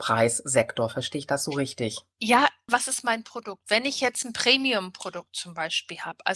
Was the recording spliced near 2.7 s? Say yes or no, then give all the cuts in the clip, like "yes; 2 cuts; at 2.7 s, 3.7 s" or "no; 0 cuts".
yes; 1 cut; at 2.7 s